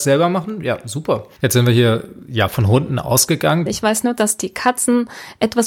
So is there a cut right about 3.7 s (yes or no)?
yes